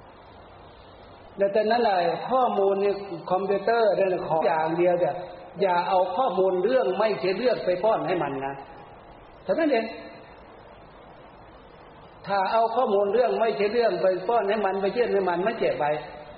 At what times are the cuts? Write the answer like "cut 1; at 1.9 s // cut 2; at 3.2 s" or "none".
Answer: cut 1; at 4.4 s